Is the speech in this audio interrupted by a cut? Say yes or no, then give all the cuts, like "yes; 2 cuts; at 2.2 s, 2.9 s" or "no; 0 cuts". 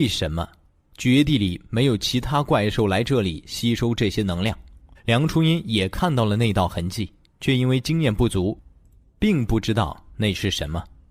yes; 1 cut; at 4.9 s